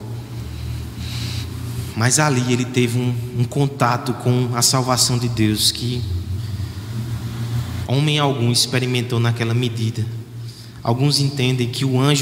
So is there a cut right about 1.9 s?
no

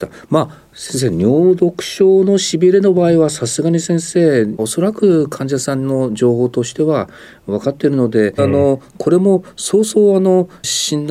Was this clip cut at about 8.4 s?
yes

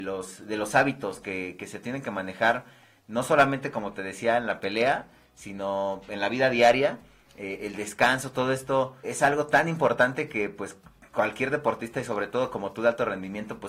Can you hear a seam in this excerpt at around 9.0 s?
yes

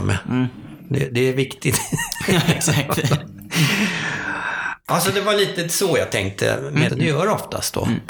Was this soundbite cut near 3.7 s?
no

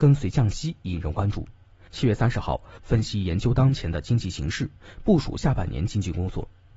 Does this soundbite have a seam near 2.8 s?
yes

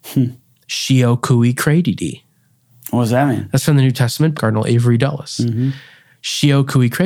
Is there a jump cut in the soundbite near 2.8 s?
no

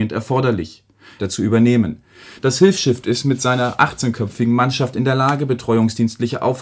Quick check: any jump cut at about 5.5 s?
no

